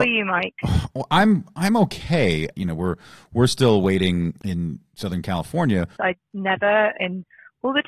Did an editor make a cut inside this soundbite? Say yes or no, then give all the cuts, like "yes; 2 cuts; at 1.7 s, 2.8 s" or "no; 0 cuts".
yes; 2 cuts; at 2.5 s, 6.0 s